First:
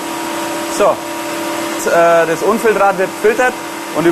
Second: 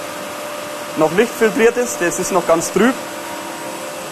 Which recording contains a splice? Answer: first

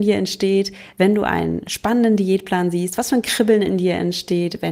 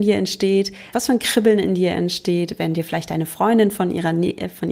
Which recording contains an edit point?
second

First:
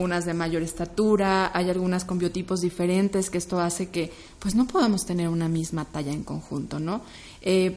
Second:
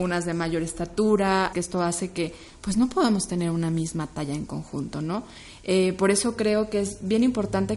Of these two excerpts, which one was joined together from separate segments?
second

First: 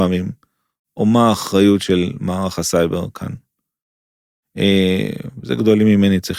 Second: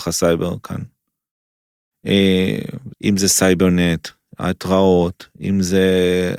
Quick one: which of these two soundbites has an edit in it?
second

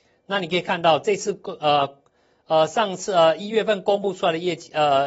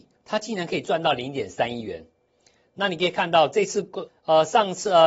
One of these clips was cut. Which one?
second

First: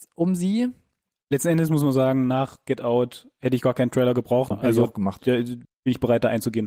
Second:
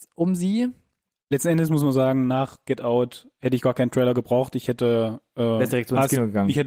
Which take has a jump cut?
first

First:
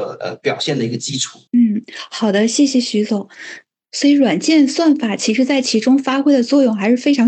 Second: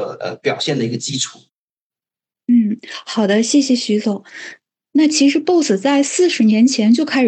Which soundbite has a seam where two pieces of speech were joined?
first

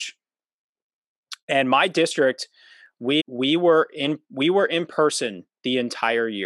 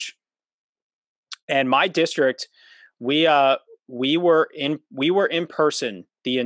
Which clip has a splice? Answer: first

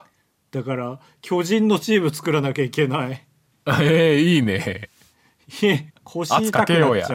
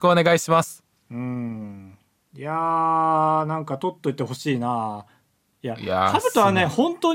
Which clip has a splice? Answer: first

